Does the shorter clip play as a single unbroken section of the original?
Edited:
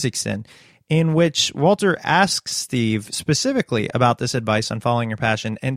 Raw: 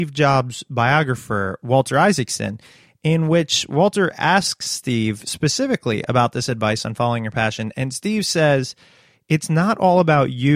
yes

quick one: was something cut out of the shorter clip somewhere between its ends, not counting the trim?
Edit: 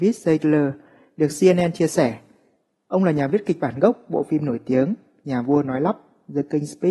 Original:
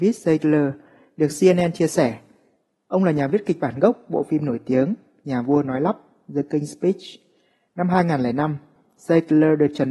no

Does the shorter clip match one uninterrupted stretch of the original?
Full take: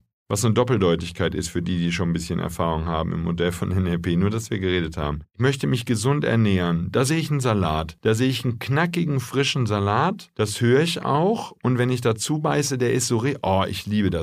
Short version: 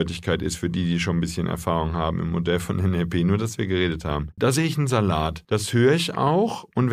no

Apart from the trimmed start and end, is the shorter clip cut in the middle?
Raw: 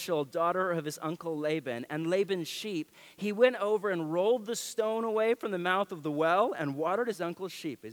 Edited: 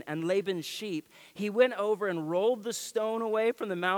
no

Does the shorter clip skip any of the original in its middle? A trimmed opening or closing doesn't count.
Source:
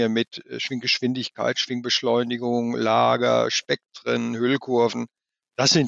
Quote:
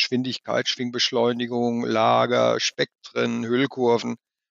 no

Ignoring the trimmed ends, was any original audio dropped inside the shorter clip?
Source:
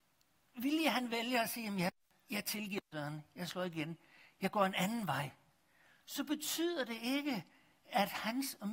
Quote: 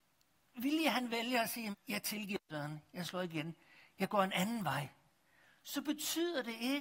yes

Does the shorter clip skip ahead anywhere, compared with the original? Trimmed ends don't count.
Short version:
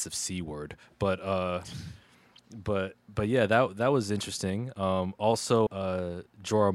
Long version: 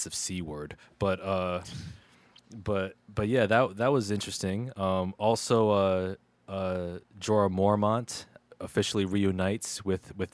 yes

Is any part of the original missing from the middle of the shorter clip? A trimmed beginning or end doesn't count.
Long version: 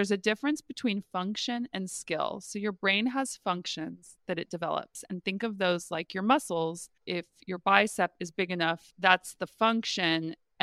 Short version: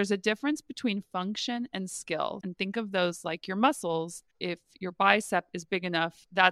yes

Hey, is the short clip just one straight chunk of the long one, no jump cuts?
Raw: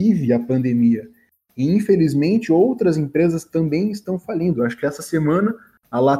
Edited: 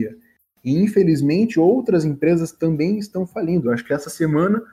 yes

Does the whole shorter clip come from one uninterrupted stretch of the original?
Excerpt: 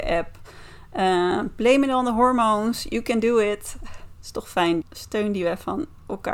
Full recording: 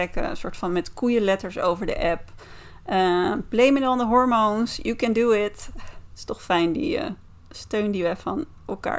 no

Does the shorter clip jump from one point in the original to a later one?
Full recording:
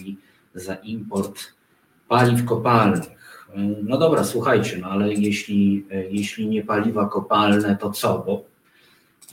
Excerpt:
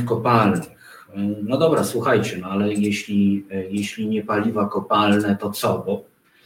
no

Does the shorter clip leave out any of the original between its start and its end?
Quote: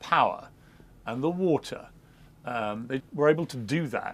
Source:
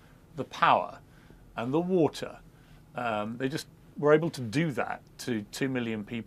yes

